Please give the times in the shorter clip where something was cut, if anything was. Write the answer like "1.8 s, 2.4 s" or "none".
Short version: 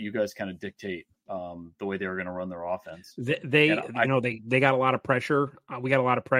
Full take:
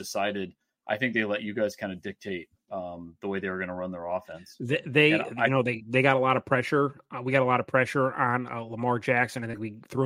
none